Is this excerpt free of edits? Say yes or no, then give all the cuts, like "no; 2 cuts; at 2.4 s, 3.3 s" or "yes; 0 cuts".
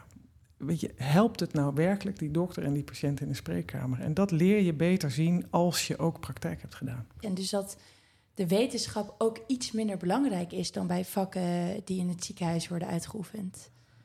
no; 1 cut; at 7.2 s